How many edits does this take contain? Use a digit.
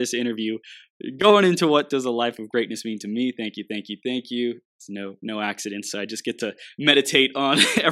0